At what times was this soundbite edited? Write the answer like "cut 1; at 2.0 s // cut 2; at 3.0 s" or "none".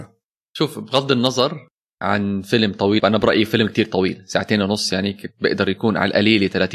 cut 1; at 3.0 s